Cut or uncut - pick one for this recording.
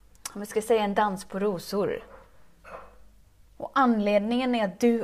cut